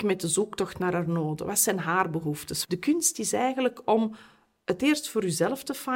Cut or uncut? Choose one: cut